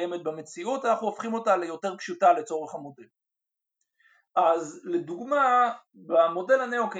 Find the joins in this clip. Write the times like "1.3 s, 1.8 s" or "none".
none